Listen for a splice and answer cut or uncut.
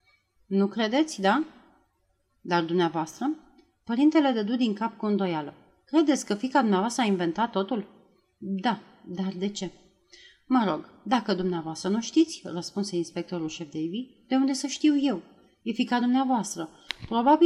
uncut